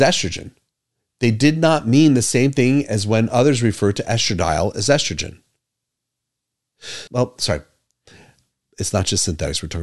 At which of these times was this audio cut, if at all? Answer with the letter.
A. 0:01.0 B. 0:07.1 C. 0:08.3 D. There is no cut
B